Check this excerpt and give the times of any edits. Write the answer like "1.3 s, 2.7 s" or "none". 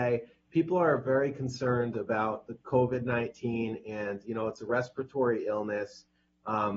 none